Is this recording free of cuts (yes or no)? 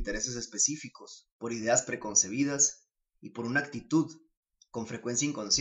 yes